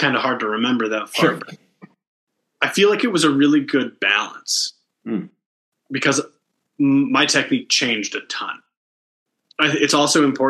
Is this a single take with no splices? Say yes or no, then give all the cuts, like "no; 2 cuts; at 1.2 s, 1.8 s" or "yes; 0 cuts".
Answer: yes; 0 cuts